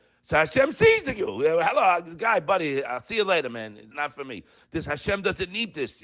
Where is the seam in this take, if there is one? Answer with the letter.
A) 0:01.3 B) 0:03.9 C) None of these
B